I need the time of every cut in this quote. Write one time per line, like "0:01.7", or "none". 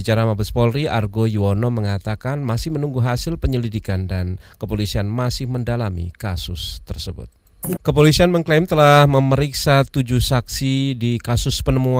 0:07.8